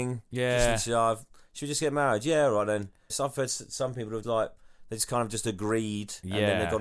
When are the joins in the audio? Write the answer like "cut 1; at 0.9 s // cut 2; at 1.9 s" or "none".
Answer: cut 1; at 3.1 s // cut 2; at 4.2 s